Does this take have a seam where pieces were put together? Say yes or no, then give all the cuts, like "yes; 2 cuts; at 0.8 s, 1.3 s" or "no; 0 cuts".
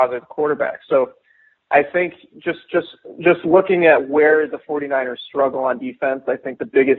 no; 0 cuts